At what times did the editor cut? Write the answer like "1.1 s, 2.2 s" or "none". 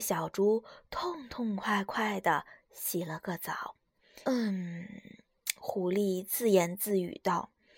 4.2 s